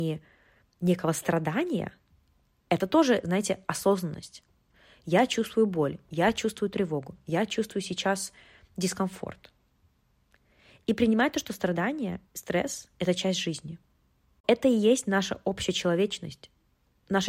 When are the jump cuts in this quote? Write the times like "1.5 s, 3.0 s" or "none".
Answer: none